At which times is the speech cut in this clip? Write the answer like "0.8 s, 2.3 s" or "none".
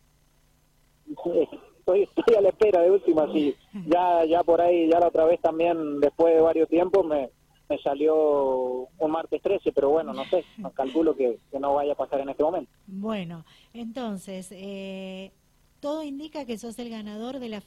none